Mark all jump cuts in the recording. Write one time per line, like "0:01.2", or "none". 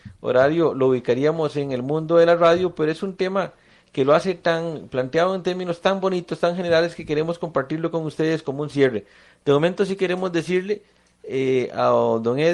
none